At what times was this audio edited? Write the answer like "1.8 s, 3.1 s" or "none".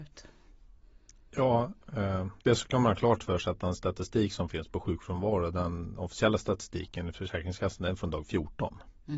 none